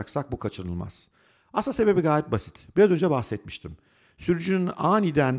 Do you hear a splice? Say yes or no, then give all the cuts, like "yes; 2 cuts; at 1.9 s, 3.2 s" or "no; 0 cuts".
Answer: yes; 1 cut; at 4.1 s